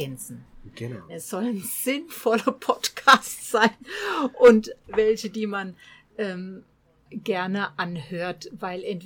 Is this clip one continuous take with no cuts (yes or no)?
no